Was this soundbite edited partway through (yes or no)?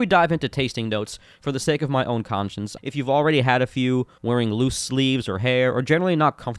yes